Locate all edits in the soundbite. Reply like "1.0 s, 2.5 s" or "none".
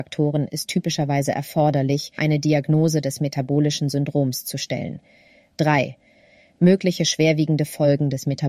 2.2 s